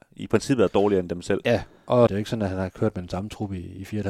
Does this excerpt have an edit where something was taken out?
yes; 1 cut; at 2.1 s

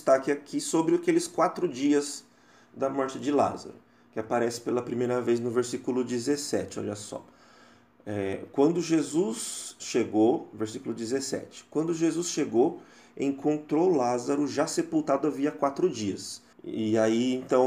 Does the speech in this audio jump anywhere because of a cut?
yes; 1 cut; at 16.5 s

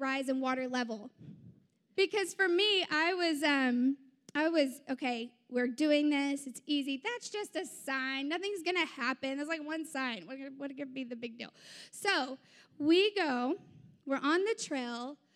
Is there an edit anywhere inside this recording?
yes; 1 cut; at 2.0 s

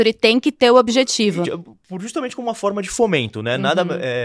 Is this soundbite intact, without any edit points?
no; 1 cut; at 1.4 s

